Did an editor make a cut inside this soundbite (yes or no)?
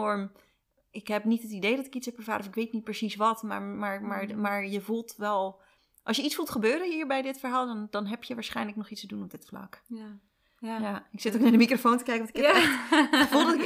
no